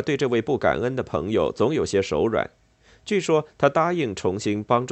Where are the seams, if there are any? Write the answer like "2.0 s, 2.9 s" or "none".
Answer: none

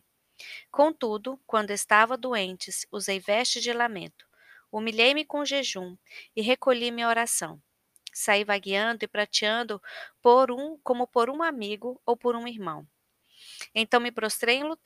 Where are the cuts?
1.4 s

